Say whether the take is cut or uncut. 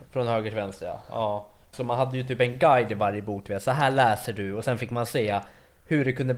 cut